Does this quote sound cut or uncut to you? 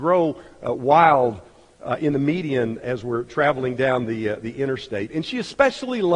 uncut